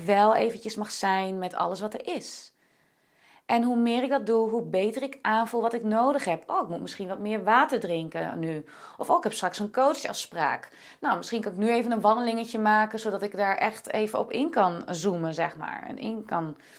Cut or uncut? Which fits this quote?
uncut